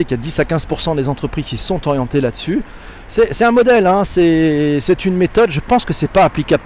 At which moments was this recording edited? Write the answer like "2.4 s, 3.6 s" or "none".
none